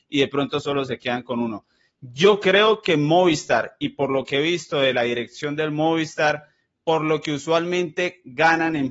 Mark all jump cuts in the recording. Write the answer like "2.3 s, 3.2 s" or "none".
none